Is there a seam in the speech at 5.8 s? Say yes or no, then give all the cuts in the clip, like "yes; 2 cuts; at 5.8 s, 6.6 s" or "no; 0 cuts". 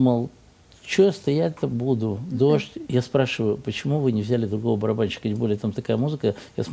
no; 1 cut; at 2.9 s